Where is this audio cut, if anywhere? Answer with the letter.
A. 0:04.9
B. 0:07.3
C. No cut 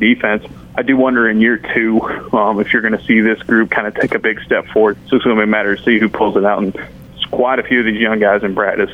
A